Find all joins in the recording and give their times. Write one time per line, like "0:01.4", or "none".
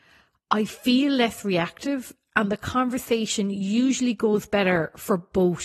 none